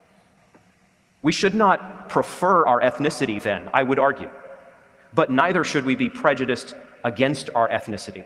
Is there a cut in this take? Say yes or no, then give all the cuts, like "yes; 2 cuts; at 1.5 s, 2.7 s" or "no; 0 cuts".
no; 0 cuts